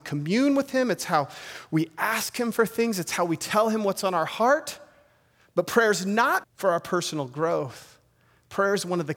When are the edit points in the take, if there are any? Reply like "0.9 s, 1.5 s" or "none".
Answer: 6.4 s